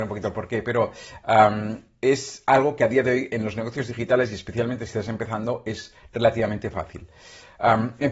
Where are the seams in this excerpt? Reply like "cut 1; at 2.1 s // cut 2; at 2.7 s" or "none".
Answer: none